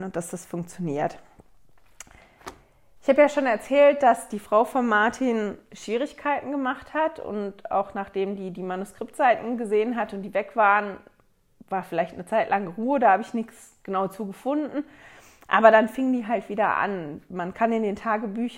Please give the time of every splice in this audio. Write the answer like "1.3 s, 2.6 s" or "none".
3.0 s